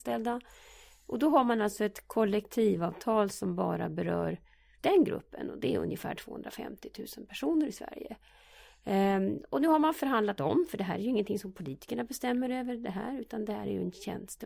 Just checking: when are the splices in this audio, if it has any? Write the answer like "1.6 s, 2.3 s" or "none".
4.8 s